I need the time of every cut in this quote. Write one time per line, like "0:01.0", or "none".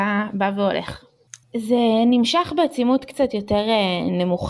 0:01.4